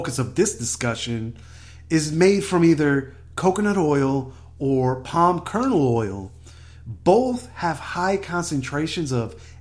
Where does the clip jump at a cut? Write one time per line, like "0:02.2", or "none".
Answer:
none